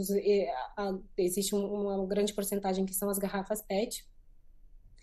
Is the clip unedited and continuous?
yes; 0 cuts

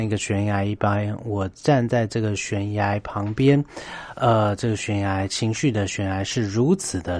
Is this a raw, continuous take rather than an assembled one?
yes; 0 cuts

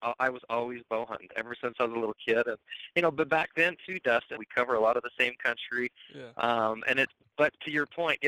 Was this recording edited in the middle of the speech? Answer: yes; 1 cut; at 4.4 s

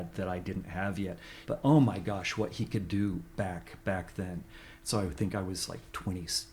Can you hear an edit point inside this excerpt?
yes; 1 cut; at 1.4 s

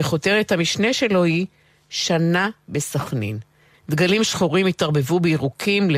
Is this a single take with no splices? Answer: no; 1 cut; at 3.7 s

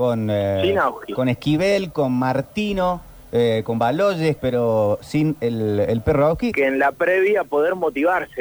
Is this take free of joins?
no; 2 cuts; at 4.4 s, 6.5 s

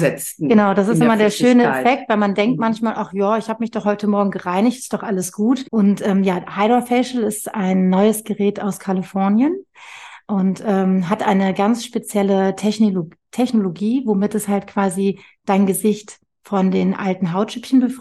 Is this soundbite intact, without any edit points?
no; 1 cut; at 5.6 s

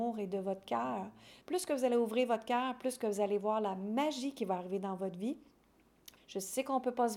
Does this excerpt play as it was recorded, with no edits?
no; 2 cuts; at 1.4 s, 6.2 s

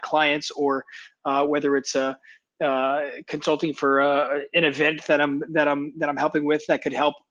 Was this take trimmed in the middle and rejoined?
no; 0 cuts

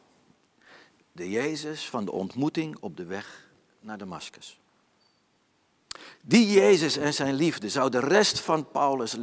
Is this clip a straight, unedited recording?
no; 1 cut; at 6.1 s

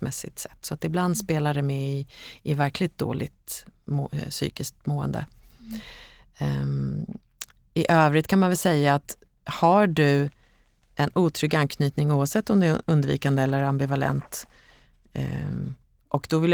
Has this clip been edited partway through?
no; 0 cuts

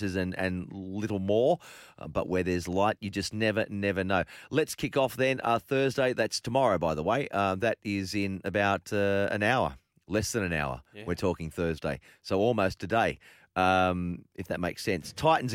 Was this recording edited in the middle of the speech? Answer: no; 0 cuts

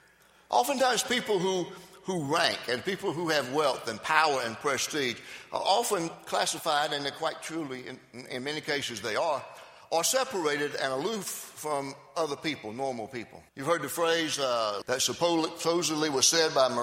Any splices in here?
yes; 2 cuts; at 13.5 s, 14.8 s

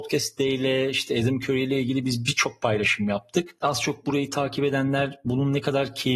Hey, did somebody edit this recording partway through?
no; 0 cuts

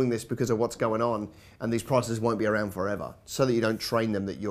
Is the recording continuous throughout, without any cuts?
yes; 0 cuts

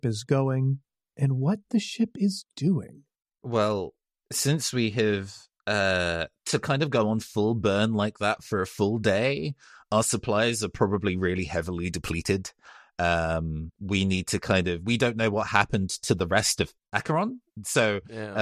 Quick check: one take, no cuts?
no; 2 cuts; at 13.7 s, 17.5 s

